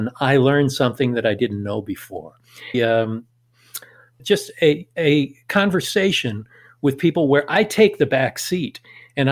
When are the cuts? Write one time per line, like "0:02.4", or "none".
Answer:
0:02.7
0:04.2